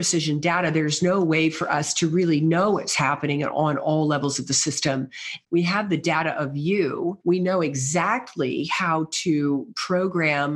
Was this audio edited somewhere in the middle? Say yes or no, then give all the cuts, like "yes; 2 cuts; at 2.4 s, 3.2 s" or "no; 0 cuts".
yes; 1 cut; at 5.4 s